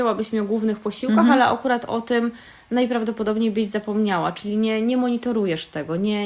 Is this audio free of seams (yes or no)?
yes